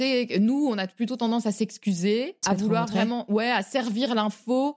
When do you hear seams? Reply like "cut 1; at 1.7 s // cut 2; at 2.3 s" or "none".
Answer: cut 1; at 2.4 s